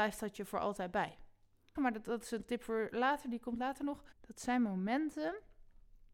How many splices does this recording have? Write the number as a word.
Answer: two